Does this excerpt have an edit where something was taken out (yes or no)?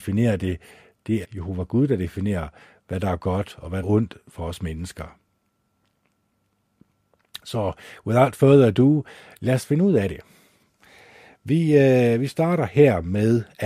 yes